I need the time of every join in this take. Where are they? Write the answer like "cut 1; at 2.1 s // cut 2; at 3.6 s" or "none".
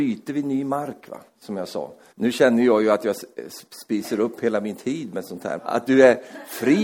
cut 1; at 2.1 s // cut 2; at 5.6 s